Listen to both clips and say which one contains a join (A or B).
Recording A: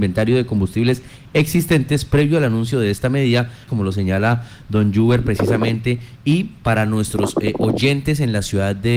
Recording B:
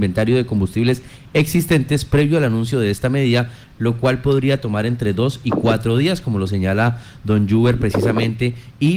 A